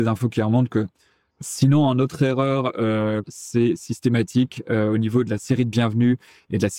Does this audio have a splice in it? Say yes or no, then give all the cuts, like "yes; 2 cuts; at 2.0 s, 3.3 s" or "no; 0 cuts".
yes; 2 cuts; at 1.3 s, 3.2 s